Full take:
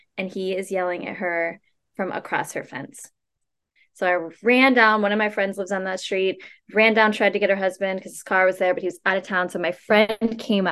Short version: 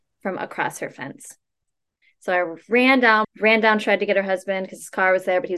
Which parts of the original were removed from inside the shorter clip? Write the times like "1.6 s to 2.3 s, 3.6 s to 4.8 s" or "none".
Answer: 5.0 s to 6.6 s